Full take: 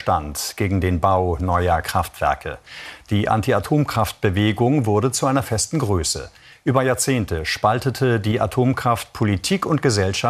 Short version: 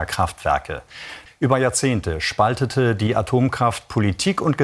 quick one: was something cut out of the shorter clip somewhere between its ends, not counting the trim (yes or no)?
yes